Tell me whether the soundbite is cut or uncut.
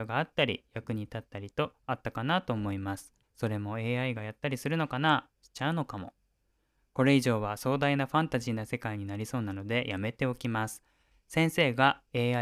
cut